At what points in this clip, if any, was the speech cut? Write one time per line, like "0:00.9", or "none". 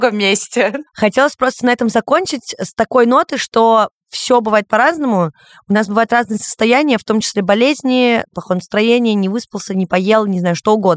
none